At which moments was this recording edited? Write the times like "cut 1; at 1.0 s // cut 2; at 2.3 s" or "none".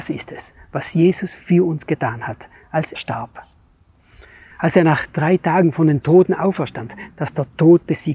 cut 1; at 2.9 s // cut 2; at 7.1 s